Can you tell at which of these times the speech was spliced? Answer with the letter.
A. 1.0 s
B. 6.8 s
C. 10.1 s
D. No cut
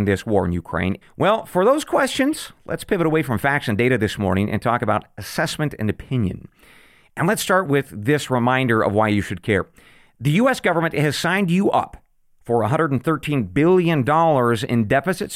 A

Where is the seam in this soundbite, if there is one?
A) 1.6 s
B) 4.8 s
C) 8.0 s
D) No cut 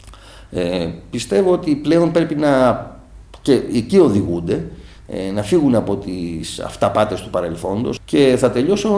C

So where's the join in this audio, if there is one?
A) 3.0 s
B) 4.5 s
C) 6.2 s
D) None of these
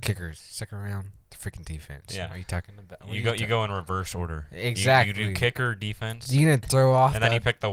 D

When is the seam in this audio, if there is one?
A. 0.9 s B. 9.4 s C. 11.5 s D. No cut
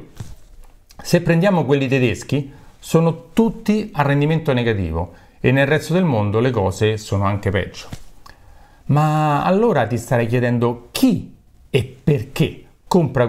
D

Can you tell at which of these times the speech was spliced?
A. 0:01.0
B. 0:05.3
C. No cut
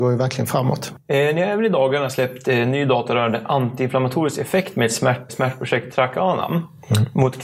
B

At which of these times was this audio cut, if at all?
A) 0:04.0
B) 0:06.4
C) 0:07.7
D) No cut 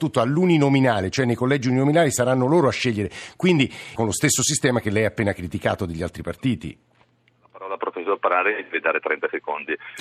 A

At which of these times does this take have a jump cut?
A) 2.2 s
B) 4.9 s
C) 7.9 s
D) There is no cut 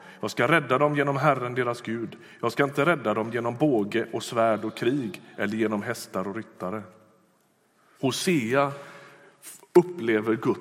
C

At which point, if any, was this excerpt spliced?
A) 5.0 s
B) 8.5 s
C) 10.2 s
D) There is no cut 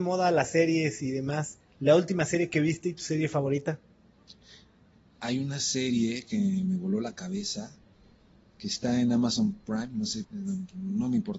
C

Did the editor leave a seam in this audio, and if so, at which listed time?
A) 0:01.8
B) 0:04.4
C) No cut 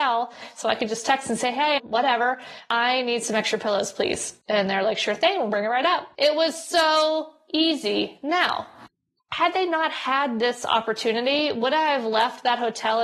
A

